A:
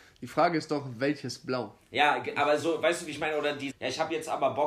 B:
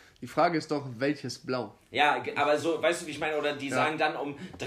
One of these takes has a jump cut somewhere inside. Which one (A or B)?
A